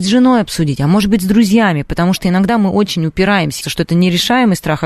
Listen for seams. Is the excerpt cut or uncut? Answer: cut